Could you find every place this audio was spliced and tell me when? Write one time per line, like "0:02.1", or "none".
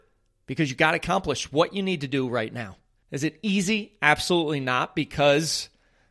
0:03.0